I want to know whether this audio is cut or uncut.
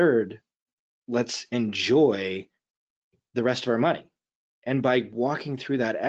uncut